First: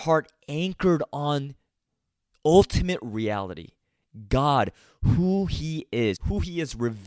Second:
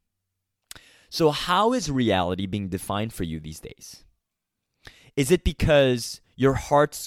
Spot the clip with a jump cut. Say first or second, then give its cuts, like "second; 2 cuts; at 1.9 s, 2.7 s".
first; 1 cut; at 6.2 s